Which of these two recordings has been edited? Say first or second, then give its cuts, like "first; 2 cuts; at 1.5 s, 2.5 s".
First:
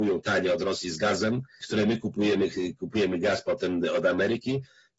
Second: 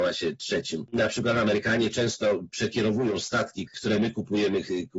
second; 1 cut; at 3.7 s